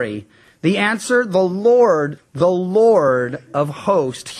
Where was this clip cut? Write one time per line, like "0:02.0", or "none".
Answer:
0:02.2